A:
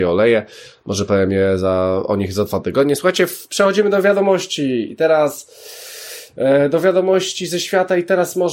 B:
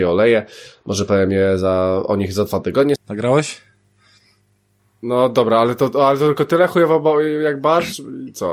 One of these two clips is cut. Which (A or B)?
B